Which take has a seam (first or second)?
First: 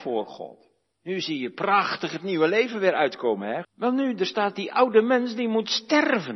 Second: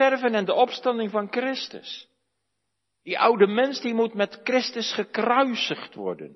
first